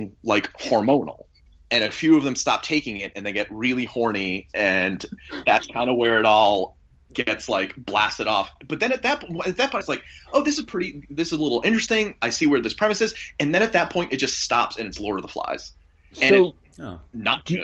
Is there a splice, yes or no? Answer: yes